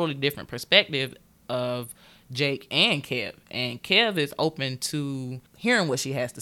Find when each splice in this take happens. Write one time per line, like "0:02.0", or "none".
0:05.5